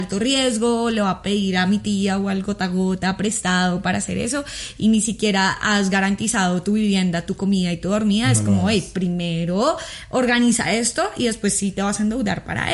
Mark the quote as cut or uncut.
uncut